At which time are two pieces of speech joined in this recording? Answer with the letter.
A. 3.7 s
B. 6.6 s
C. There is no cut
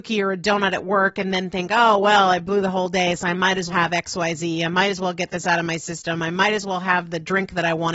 A